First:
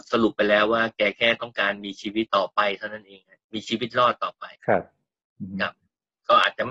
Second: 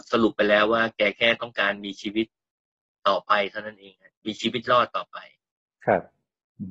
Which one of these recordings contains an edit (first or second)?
first